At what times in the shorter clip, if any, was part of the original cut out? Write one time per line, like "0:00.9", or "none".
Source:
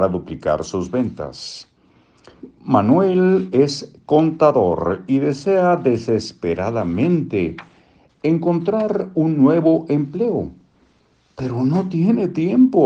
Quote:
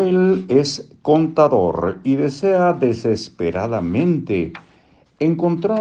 none